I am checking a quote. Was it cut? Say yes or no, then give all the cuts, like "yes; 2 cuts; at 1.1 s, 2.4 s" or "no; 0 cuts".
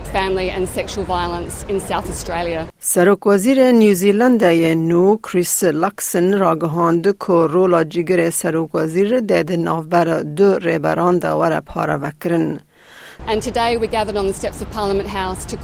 yes; 1 cut; at 13.2 s